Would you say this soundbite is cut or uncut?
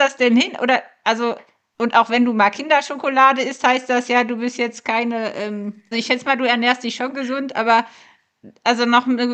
cut